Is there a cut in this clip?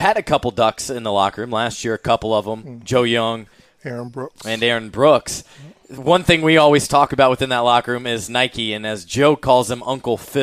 no; 0 cuts

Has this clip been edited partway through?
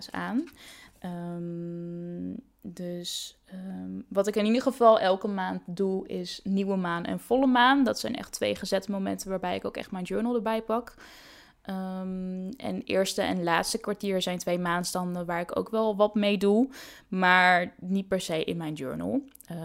no; 0 cuts

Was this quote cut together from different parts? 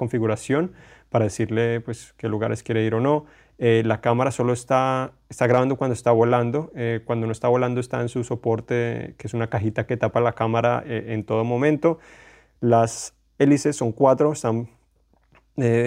no; 0 cuts

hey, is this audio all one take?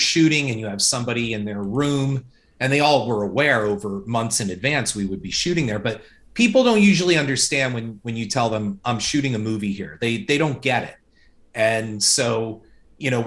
yes; 0 cuts

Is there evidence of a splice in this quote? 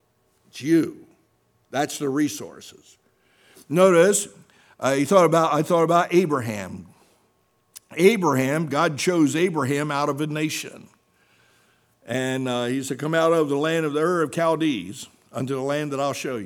no; 0 cuts

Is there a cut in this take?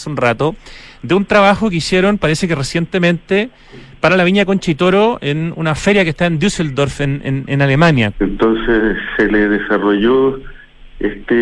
yes; 1 cut; at 8.1 s

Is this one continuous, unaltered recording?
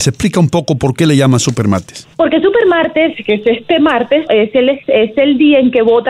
no; 2 cuts; at 2.1 s, 4.3 s

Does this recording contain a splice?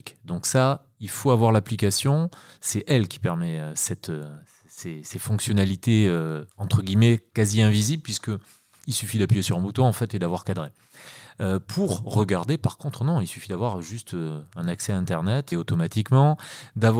yes; 2 cuts; at 6.5 s, 15.5 s

